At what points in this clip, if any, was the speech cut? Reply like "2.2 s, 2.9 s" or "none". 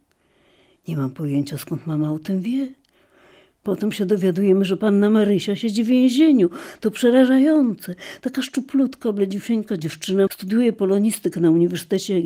10.3 s

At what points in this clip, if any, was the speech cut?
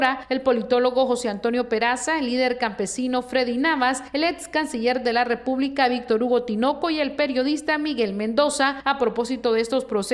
none

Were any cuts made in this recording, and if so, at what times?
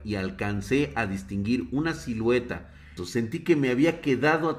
3.0 s

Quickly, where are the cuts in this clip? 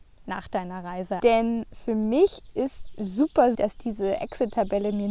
1.2 s, 3.5 s

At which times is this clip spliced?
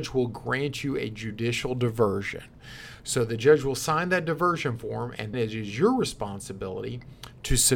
5.3 s

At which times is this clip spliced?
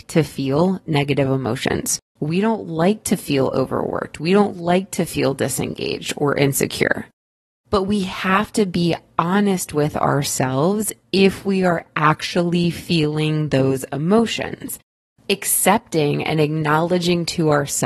2.2 s

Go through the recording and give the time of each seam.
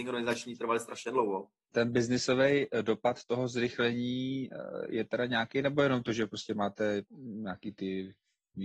1.7 s, 7.1 s

